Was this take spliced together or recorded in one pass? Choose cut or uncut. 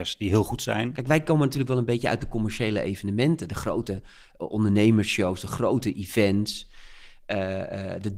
cut